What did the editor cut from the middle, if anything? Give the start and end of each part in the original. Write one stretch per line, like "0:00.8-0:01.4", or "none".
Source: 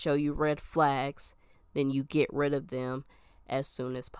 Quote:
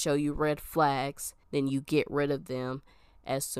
0:01.4-0:01.7